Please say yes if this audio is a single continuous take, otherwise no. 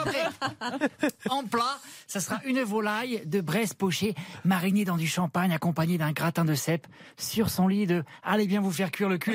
yes